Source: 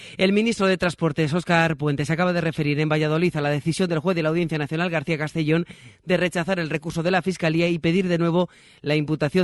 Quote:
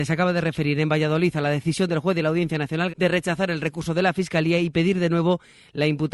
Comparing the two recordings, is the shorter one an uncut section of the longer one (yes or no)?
no